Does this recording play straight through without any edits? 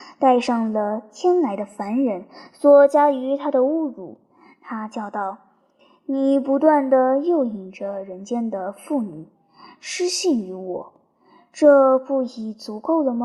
yes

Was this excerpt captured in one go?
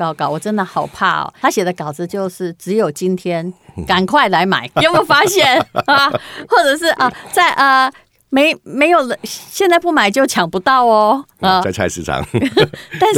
no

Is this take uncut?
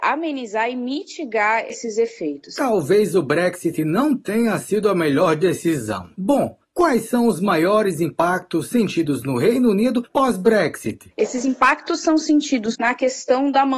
no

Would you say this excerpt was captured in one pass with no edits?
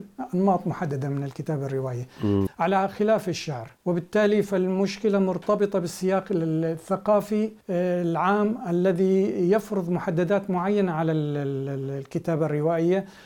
no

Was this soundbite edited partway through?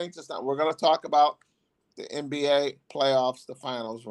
yes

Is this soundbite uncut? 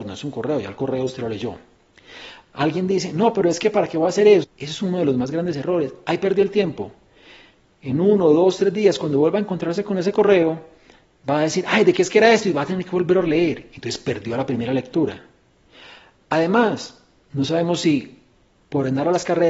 no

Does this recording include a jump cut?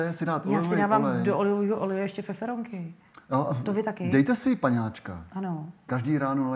no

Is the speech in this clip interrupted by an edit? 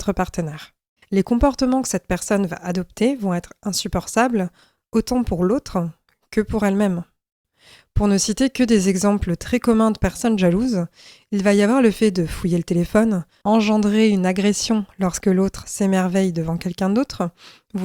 yes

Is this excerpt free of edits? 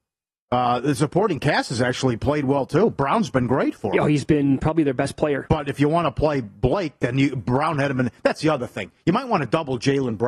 yes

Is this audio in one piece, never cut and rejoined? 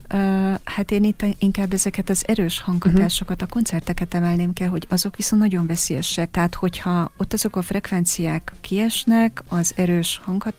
no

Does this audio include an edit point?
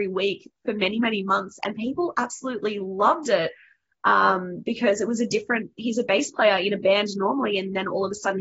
no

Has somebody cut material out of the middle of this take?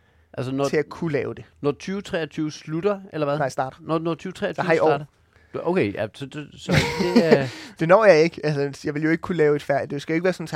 no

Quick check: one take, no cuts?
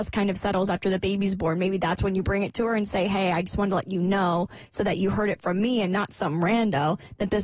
yes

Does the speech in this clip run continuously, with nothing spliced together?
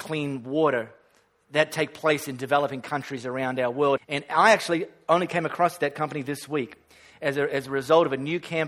no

